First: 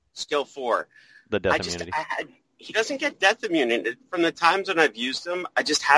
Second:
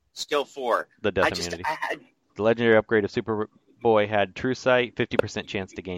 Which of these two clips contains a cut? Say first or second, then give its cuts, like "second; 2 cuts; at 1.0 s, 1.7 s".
second; 2 cuts; at 0.9 s, 2.2 s